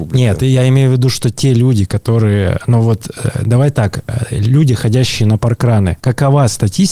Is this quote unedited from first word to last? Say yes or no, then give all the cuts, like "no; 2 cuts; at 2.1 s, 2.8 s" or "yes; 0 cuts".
yes; 0 cuts